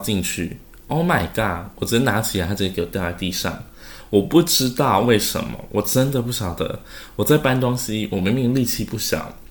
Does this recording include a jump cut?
no; 0 cuts

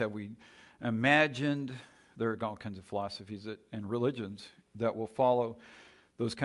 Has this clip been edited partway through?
no; 0 cuts

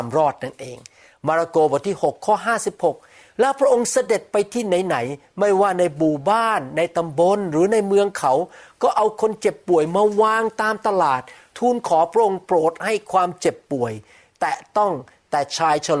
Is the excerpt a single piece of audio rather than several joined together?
yes; 0 cuts

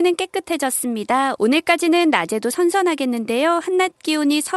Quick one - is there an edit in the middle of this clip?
yes; 1 cut; at 1.4 s

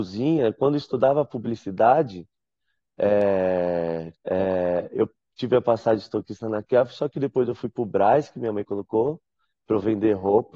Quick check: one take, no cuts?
no; 1 cut; at 4.1 s

